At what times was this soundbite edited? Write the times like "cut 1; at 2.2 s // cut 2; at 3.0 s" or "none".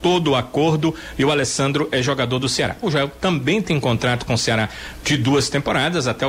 cut 1; at 2.8 s